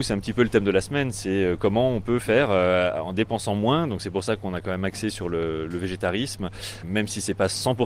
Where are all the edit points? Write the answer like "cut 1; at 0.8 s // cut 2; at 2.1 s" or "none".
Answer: cut 1; at 6.8 s